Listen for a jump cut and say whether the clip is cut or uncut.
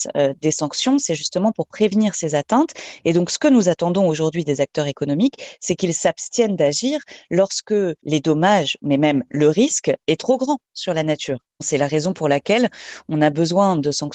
uncut